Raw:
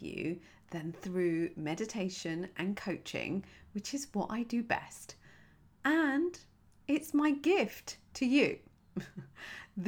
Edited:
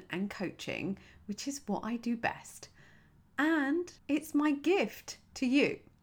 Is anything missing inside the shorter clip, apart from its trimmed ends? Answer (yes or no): yes